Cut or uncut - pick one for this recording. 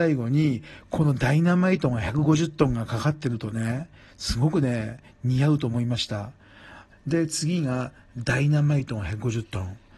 cut